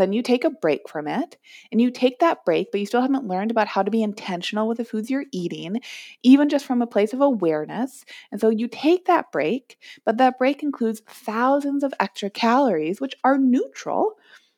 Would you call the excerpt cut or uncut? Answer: uncut